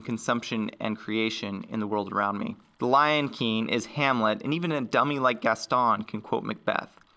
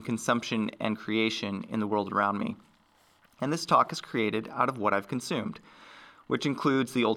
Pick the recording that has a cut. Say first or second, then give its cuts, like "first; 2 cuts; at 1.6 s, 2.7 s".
first; 1 cut; at 2.7 s